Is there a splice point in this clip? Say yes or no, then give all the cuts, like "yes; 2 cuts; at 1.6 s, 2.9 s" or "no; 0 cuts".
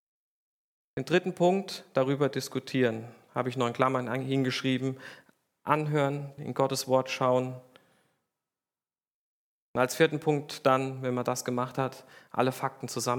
yes; 1 cut; at 6.4 s